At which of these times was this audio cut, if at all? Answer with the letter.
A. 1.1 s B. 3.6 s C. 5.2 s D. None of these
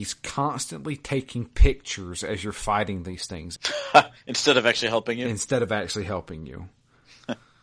B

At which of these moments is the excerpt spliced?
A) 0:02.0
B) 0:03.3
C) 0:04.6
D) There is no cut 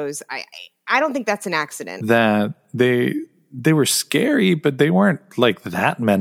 A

